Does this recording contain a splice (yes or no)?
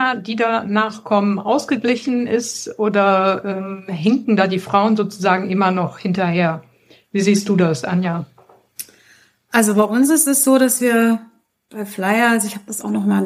no